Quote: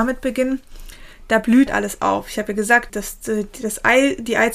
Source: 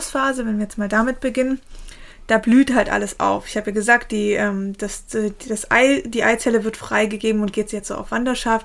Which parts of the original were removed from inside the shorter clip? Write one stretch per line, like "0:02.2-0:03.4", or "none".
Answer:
0:02.7-0:02.8
0:04.1-0:04.8